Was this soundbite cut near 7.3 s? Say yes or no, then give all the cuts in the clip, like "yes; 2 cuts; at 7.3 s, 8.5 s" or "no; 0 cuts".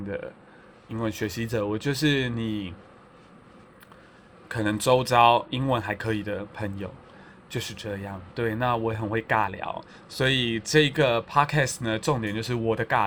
no; 0 cuts